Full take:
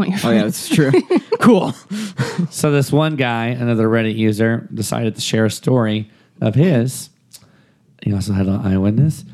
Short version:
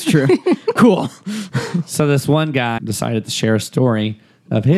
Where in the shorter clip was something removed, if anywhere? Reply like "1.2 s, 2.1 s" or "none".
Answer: 2.8 s